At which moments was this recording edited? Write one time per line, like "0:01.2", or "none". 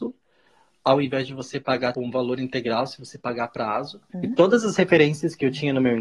0:01.9
0:04.1